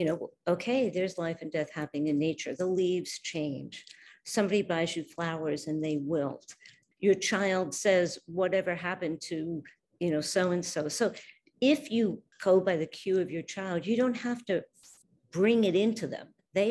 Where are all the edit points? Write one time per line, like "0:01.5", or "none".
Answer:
0:12.3